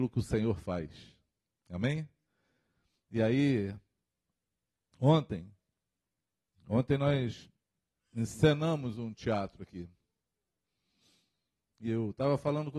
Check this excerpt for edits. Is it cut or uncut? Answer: uncut